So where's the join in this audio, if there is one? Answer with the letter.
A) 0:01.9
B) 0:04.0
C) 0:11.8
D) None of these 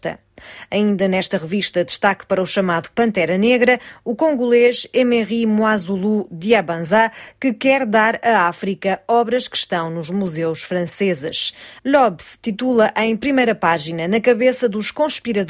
C